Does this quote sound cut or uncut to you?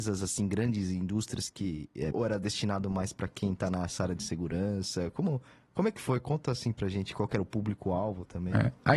cut